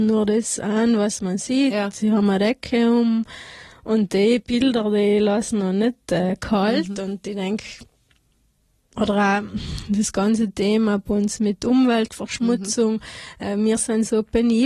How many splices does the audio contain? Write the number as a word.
zero